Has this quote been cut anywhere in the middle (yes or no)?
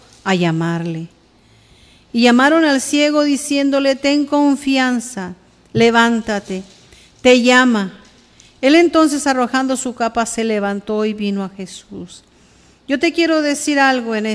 no